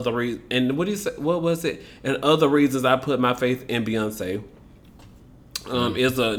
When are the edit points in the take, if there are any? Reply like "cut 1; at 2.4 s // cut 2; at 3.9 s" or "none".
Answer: none